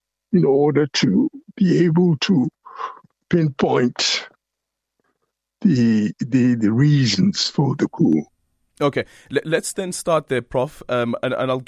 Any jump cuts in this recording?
no; 0 cuts

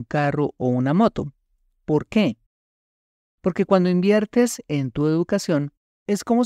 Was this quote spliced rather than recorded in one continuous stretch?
no; 0 cuts

